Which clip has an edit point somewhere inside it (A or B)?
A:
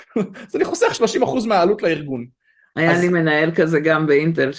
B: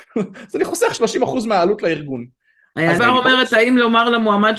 B